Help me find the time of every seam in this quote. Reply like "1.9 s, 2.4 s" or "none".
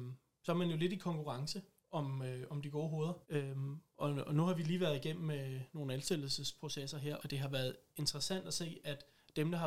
3.2 s, 7.2 s